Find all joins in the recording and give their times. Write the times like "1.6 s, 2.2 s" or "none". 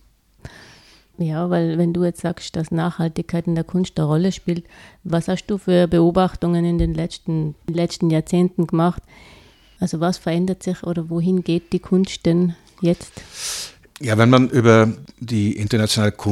none

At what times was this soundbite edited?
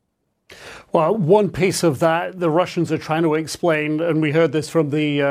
none

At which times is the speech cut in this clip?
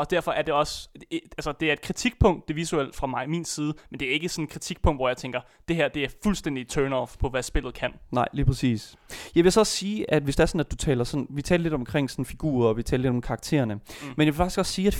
7.2 s

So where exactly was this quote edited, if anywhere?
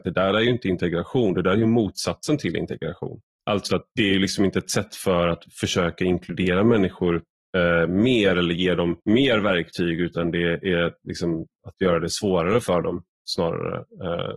3.7 s, 9.0 s

